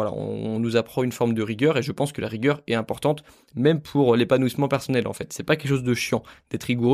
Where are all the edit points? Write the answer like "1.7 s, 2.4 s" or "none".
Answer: none